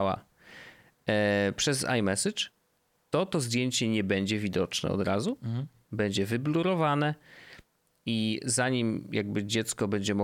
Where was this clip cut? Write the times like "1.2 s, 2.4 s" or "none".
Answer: none